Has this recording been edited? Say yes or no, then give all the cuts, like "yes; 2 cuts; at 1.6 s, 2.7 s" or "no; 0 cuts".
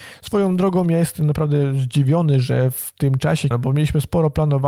yes; 1 cut; at 3.5 s